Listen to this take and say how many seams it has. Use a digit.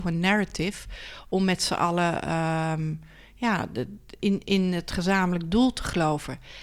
0